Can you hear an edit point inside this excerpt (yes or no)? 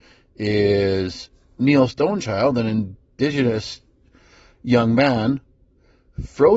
no